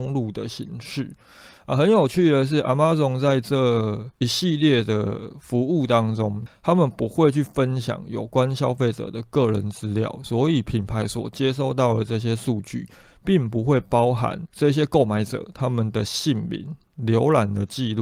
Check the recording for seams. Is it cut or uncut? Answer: cut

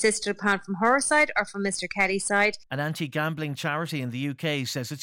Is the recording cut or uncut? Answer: cut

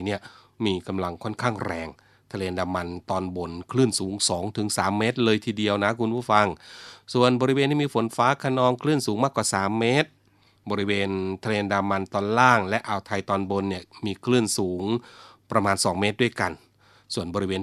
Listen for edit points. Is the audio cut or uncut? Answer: uncut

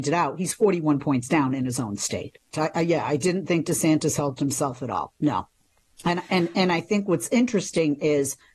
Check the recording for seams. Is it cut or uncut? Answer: cut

